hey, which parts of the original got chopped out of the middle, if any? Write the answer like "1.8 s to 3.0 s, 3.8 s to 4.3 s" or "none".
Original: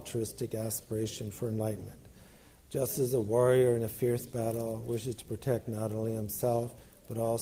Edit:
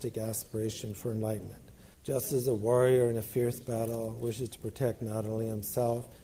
2.3 s to 2.6 s